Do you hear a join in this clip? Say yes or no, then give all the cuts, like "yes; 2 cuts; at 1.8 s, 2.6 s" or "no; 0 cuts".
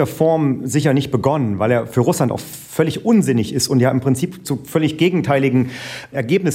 no; 0 cuts